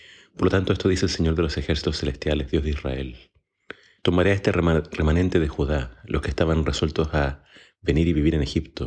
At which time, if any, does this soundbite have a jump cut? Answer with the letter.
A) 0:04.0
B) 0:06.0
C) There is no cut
A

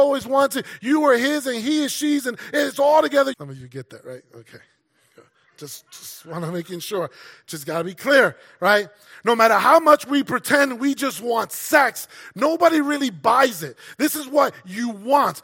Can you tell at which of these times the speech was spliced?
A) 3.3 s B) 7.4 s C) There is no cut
A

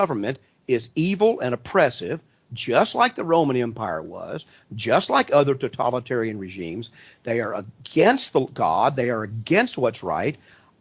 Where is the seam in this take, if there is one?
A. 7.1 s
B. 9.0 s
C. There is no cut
C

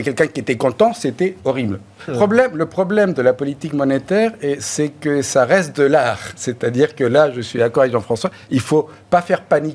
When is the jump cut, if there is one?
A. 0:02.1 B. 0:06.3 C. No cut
A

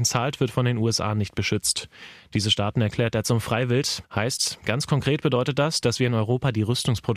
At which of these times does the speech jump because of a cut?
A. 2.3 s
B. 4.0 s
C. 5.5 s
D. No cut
B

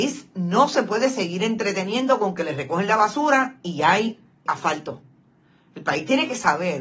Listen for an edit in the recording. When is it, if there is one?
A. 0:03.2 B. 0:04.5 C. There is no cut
B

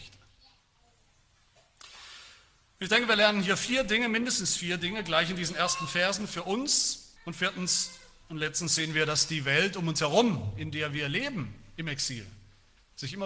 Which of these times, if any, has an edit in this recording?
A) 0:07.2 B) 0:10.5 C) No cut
A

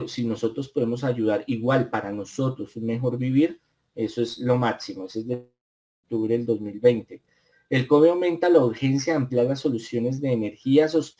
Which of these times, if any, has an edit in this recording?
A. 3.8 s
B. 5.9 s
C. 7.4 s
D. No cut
D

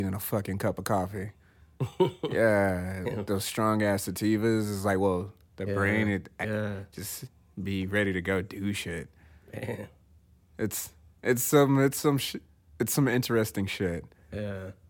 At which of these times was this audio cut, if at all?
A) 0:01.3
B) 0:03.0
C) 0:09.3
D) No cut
B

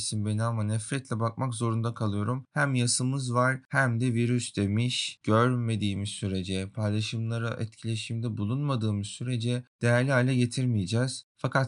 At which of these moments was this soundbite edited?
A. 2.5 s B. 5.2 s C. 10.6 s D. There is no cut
B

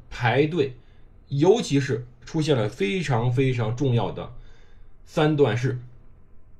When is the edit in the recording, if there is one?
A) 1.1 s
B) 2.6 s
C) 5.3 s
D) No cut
A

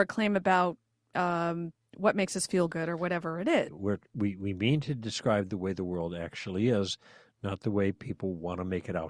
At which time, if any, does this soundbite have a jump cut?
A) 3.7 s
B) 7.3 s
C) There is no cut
A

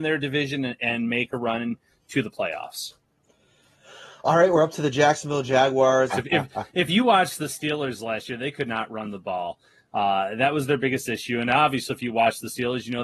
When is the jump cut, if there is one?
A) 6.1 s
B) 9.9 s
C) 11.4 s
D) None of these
A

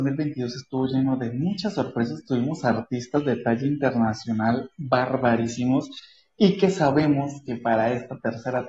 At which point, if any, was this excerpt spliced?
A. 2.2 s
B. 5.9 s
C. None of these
C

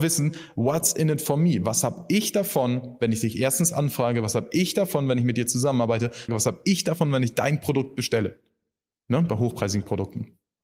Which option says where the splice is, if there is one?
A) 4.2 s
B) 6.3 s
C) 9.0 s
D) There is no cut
B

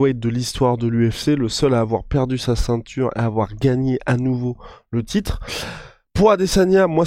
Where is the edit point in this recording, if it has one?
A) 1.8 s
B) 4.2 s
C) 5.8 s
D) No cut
D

